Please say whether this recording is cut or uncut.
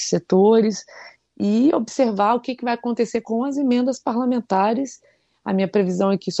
cut